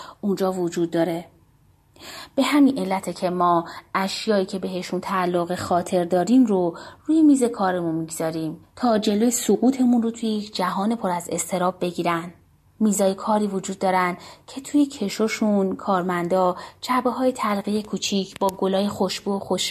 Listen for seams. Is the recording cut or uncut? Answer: uncut